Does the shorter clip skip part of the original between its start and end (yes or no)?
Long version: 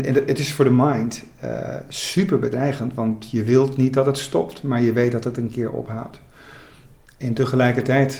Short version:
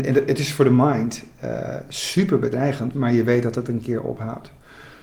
yes